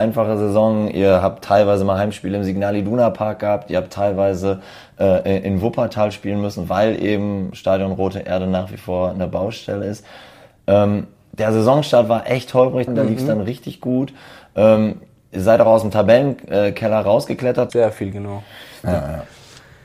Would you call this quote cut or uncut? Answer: cut